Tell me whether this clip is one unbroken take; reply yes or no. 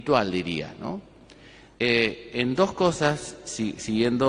no